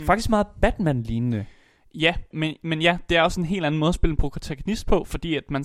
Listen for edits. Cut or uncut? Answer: cut